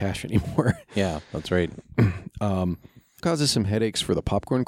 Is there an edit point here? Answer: yes; 1 cut; at 3.2 s

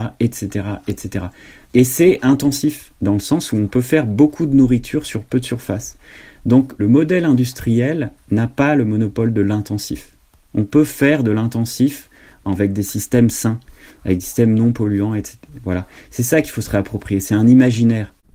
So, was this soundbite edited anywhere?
no; 0 cuts

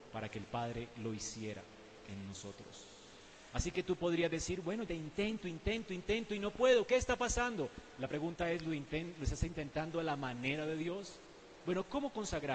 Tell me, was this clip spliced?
yes; 1 cut; at 4.9 s

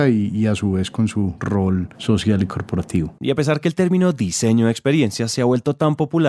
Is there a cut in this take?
yes; 1 cut; at 3.2 s

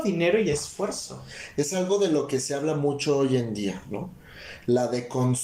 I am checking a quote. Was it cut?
no; 0 cuts

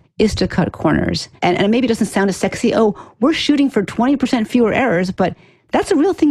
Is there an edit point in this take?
yes; 1 cut; at 1.4 s

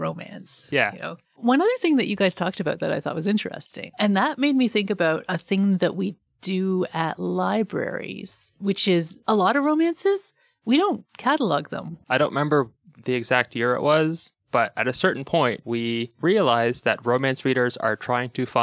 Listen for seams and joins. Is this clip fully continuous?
no; 3 cuts; at 1.2 s, 3.9 s, 12.0 s

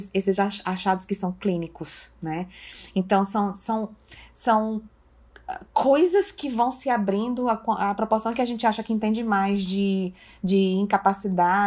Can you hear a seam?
no; 0 cuts

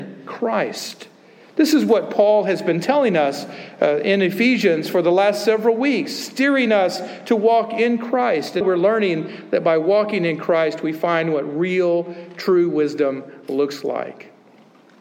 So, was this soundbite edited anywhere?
yes; 1 cut; at 8.6 s

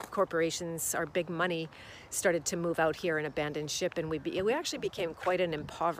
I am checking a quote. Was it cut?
no; 0 cuts

